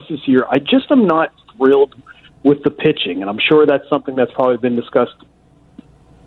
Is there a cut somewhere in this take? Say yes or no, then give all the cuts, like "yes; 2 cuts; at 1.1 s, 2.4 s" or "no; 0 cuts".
no; 0 cuts